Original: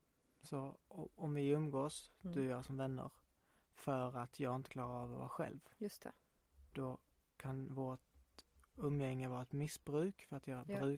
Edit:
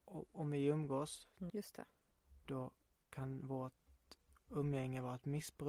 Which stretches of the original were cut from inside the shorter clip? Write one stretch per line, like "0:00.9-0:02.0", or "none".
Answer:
0:02.3-0:05.8